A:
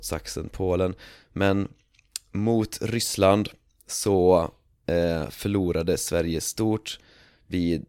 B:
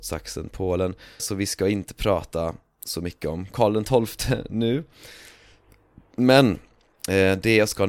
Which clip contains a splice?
B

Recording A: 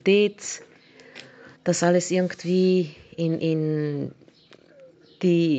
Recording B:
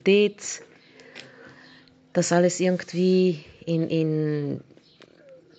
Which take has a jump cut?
A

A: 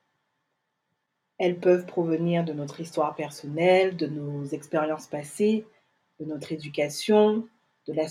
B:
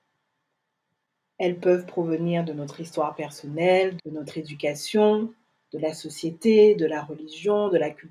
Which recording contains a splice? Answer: B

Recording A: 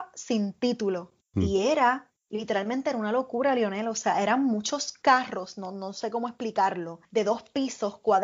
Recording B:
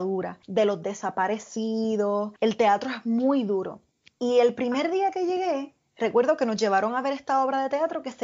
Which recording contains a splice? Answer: B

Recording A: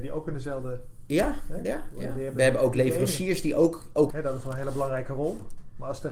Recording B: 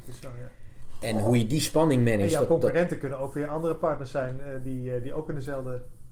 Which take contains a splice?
A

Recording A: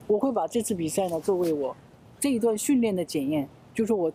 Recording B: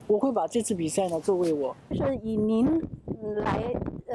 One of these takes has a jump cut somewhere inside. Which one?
B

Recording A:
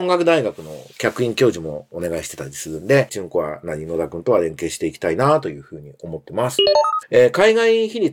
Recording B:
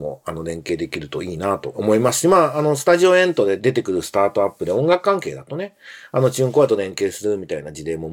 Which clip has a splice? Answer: A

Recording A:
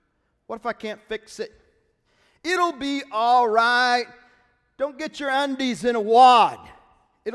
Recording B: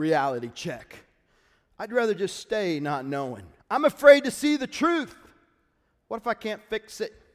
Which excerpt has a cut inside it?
B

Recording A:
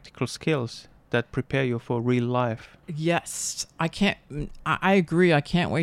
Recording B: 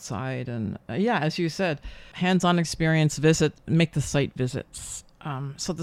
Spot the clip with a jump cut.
A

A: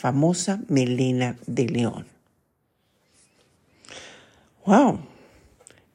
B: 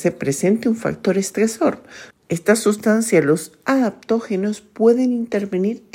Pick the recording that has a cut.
B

